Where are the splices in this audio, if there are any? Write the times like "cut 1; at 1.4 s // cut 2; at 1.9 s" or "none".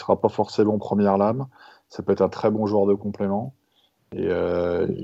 none